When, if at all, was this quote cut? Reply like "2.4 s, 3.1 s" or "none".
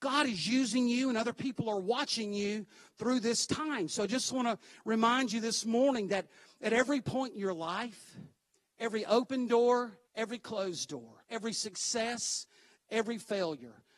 10.1 s, 11.2 s